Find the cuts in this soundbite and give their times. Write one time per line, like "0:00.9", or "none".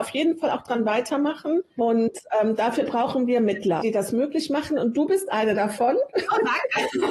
0:01.8
0:03.8